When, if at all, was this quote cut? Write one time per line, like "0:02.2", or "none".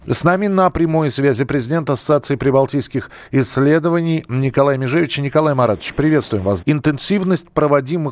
0:06.6